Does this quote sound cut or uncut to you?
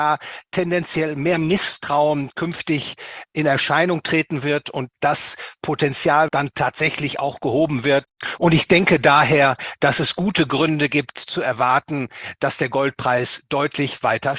cut